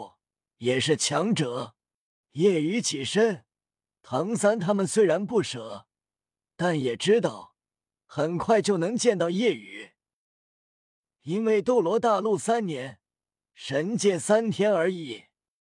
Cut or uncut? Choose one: cut